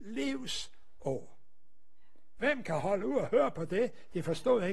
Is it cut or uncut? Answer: cut